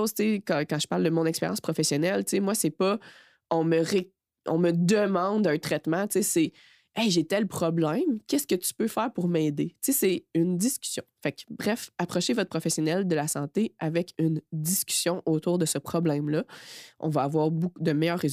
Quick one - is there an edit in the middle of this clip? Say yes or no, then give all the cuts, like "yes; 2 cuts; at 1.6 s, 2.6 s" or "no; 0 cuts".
no; 0 cuts